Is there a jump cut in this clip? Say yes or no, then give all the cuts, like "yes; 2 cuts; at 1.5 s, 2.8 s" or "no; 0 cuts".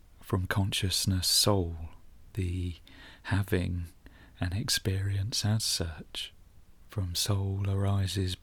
no; 0 cuts